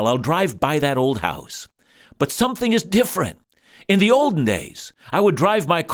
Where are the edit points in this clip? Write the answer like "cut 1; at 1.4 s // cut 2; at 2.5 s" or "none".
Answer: none